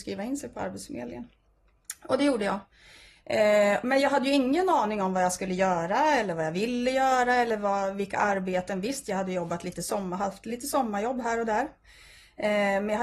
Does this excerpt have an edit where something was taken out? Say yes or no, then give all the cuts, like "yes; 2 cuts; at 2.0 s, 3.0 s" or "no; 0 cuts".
no; 0 cuts